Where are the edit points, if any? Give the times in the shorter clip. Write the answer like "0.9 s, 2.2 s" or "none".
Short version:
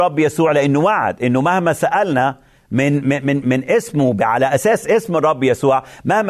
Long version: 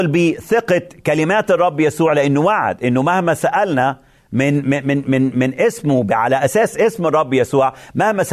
3.4 s